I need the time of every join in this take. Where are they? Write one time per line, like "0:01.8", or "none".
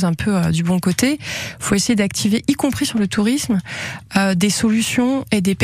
none